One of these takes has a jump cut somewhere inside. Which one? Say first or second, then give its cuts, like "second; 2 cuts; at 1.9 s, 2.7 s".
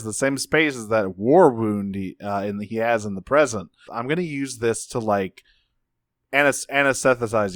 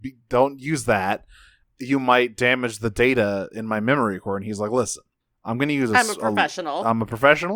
first; 1 cut; at 3.9 s